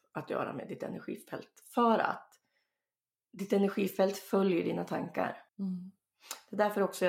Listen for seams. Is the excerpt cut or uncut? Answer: cut